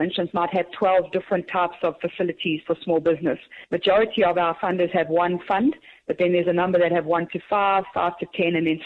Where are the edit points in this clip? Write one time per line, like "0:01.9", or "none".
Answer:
none

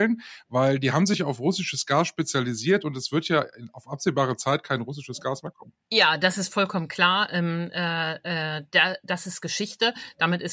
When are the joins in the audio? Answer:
none

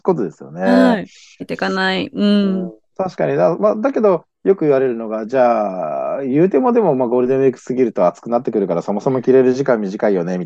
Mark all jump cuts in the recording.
0:01.4

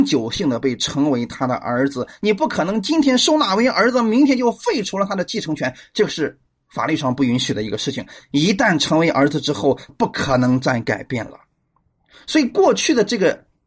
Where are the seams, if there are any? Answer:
0:09.9

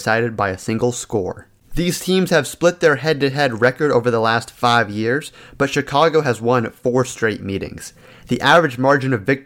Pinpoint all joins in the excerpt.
none

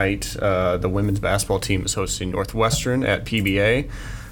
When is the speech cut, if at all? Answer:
none

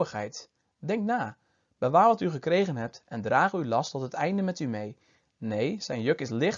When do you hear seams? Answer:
0:05.2

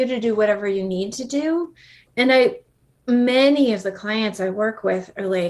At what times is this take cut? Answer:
0:02.1

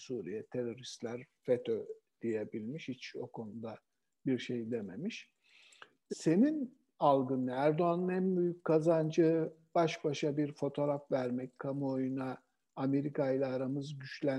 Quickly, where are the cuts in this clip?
0:06.1

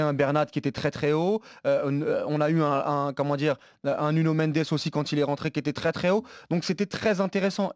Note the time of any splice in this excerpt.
none

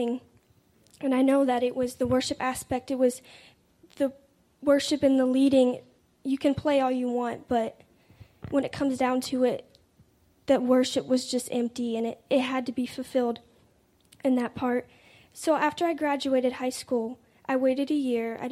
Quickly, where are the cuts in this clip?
none

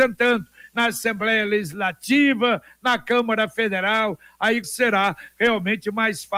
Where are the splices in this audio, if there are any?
0:04.6

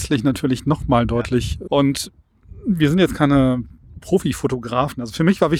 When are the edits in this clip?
0:01.7

